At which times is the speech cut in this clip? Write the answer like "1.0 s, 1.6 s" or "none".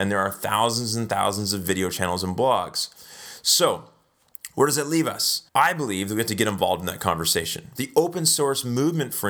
5.5 s, 7.8 s